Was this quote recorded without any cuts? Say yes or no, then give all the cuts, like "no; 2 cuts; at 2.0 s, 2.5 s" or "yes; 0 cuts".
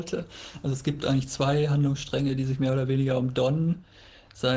yes; 0 cuts